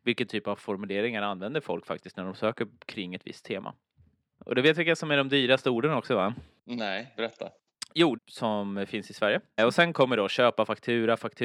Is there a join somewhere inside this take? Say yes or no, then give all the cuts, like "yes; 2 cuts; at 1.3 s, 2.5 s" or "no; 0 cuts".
yes; 2 cuts; at 8.2 s, 9.6 s